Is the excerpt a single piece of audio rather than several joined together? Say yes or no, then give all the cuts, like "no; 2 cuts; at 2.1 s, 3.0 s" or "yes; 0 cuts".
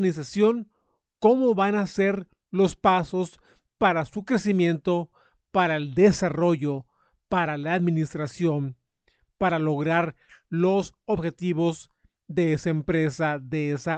yes; 0 cuts